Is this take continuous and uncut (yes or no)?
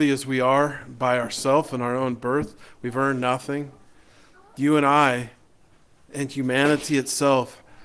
yes